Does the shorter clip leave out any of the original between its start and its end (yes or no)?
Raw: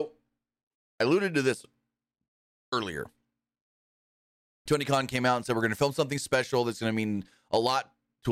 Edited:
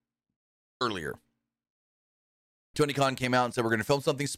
no